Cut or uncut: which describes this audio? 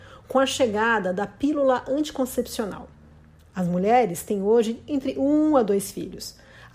uncut